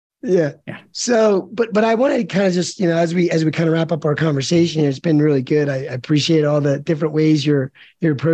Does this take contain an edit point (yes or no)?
no